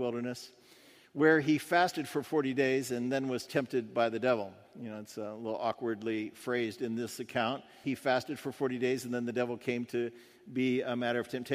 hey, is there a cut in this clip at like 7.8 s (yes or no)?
yes